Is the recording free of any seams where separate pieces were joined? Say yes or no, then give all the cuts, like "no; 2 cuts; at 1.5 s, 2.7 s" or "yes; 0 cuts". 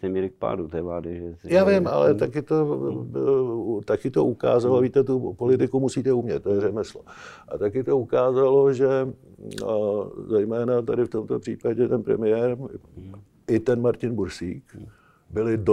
yes; 0 cuts